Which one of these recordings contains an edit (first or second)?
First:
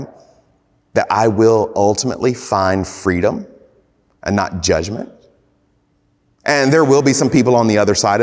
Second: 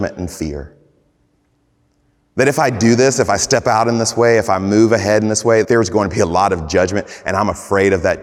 second